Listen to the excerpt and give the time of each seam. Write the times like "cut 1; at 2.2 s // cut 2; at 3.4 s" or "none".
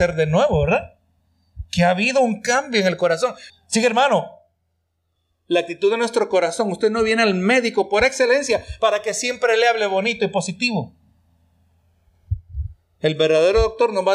cut 1; at 3.5 s